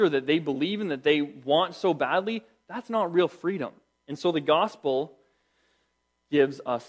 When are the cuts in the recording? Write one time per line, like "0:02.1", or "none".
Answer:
0:04.0